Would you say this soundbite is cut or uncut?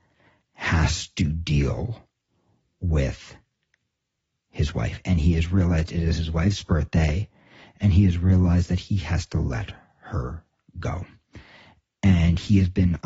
uncut